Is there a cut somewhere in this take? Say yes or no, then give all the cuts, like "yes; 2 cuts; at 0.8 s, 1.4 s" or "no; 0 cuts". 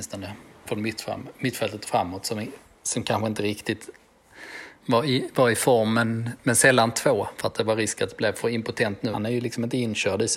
yes; 1 cut; at 9.1 s